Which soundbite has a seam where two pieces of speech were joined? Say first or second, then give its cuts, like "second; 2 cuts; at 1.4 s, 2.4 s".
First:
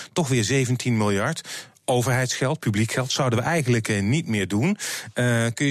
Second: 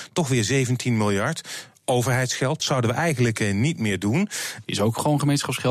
second; 2 cuts; at 2.6 s, 4.6 s